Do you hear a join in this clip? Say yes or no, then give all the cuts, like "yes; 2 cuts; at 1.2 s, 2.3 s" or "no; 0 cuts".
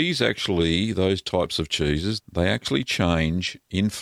yes; 1 cut; at 2.2 s